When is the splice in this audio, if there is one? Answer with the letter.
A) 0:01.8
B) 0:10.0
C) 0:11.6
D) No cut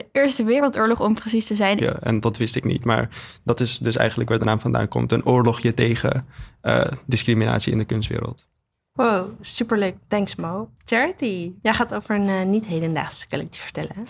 A